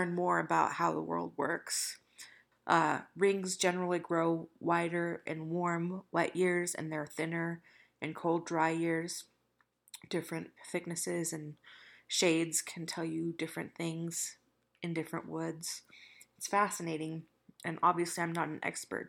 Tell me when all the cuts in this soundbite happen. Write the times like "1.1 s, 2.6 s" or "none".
2.5 s, 10.6 s